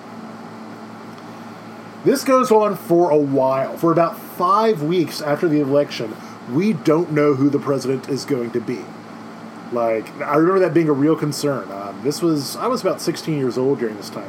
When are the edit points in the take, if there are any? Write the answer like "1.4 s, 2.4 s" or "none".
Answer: none